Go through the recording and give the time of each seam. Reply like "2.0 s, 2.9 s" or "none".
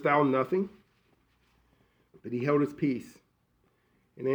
2.1 s

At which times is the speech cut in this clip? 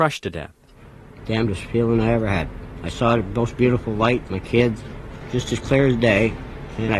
4.3 s

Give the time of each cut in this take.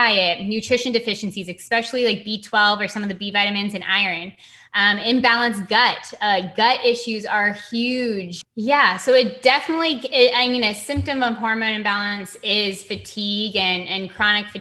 8.4 s

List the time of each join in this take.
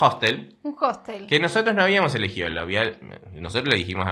none

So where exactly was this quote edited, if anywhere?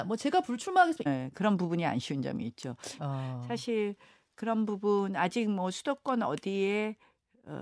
1.1 s, 3.0 s

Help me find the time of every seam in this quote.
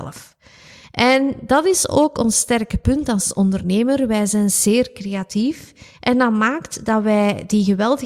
none

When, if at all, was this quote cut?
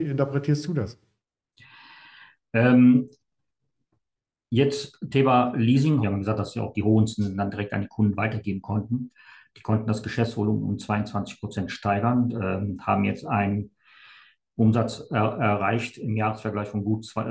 6.0 s

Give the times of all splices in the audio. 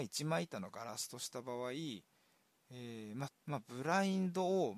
3.3 s

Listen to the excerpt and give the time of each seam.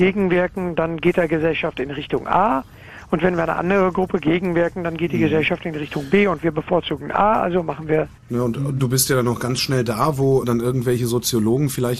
8.2 s, 10.4 s

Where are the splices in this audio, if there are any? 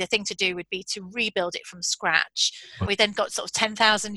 2.8 s

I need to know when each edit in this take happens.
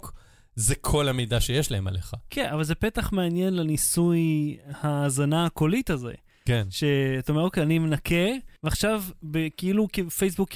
8.6 s

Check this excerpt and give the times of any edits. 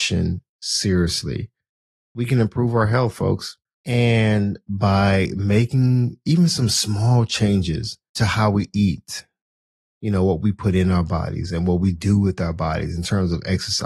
none

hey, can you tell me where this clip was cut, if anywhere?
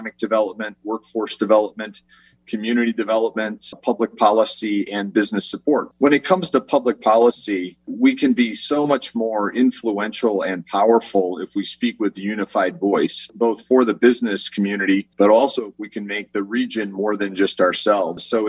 5.9 s, 15.1 s

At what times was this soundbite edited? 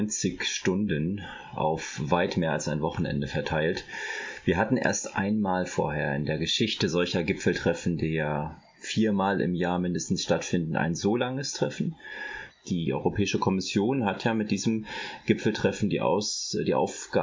12.5 s

